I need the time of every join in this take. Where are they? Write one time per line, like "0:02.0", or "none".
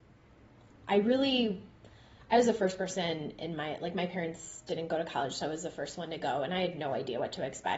none